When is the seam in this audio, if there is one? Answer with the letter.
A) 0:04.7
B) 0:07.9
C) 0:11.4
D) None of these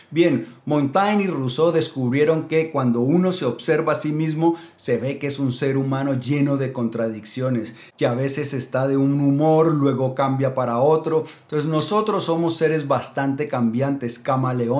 D